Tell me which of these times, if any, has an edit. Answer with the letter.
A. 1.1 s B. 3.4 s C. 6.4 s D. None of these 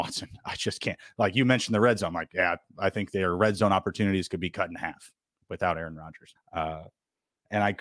C